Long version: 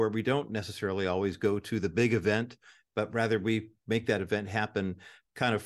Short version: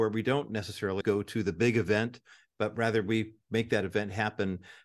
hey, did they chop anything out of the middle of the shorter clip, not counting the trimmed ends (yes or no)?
yes